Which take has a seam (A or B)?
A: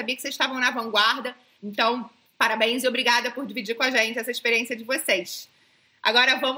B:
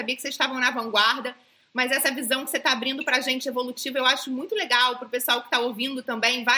A